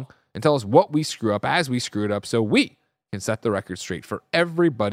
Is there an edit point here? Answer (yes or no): no